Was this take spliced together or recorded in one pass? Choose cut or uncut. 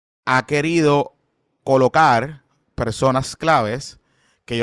cut